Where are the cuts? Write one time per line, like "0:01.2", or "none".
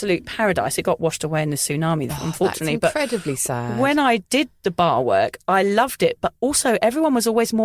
0:02.1